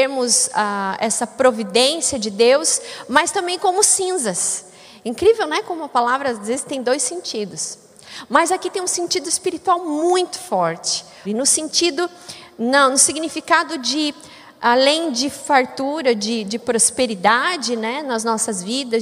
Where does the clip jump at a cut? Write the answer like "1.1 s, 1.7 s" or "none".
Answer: 11.2 s

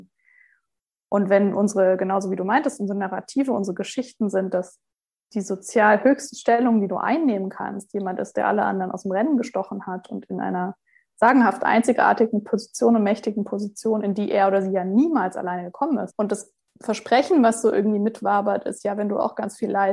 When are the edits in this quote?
16.1 s

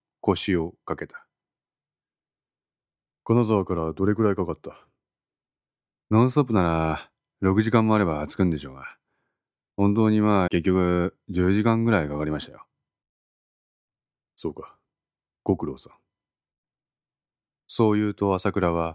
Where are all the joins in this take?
10.5 s

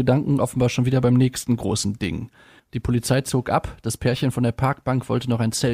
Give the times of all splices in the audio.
2.6 s

